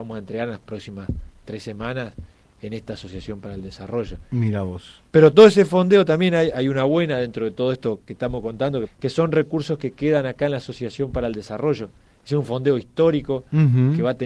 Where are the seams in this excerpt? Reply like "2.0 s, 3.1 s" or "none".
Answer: 6.5 s, 8.8 s